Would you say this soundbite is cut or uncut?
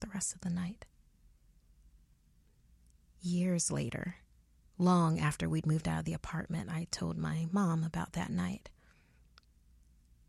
uncut